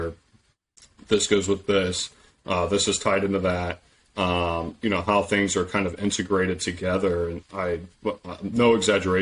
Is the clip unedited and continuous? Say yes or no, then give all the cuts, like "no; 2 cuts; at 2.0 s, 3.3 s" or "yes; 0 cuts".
no; 1 cut; at 7.4 s